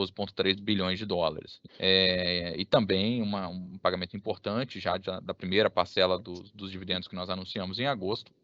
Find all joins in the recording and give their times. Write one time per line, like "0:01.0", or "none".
0:01.7